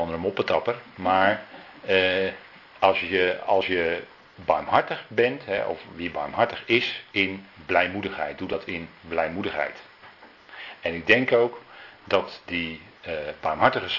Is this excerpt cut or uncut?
uncut